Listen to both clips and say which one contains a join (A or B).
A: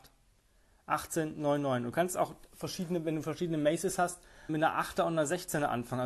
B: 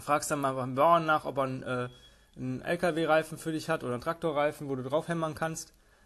A